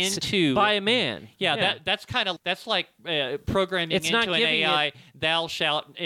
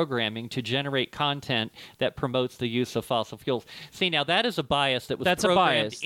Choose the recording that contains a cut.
first; 1 cut; at 2.4 s

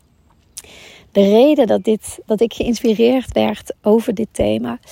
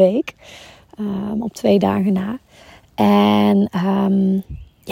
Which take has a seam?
first; 1 cut; at 2.3 s

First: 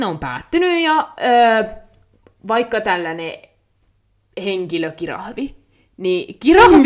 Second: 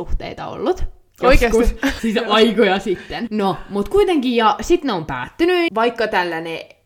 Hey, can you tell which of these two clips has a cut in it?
second; 3 cuts; at 2.0 s, 3.3 s, 5.7 s

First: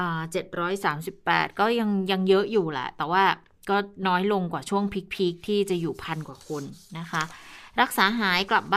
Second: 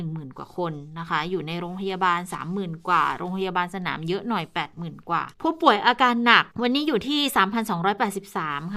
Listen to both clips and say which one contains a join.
second; 2 cuts; at 5.3 s, 6.5 s

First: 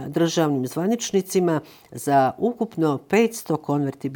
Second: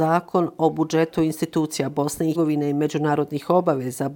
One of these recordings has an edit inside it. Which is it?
second; 1 cut; at 2.3 s

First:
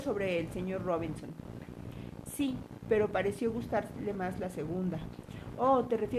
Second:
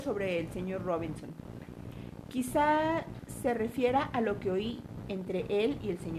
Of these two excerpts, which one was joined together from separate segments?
first; 1 cut; at 2.3 s

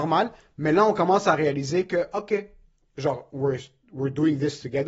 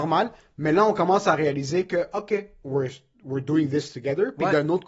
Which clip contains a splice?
second; 1 cut; at 2.6 s

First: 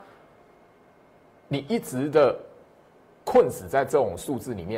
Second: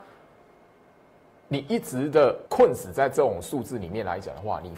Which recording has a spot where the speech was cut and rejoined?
second; 1 cut; at 2.5 s

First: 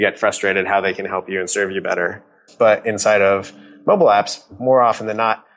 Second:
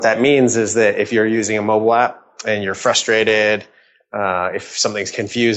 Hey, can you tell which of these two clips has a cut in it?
first; 1 cut; at 2.5 s

